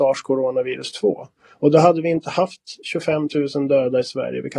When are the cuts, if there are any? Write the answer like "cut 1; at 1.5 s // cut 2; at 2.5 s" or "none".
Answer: none